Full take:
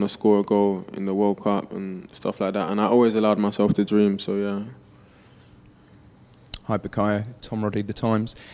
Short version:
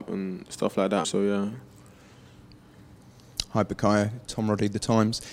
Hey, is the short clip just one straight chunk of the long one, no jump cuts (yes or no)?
no